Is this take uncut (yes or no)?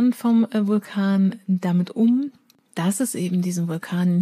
yes